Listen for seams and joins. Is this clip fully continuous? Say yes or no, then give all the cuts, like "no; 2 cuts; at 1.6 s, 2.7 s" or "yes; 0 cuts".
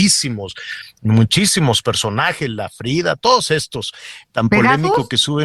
no; 1 cut; at 4.2 s